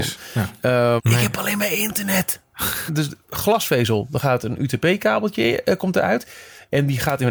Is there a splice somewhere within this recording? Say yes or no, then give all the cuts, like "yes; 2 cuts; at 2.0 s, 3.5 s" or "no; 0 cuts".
yes; 2 cuts; at 1.0 s, 2.9 s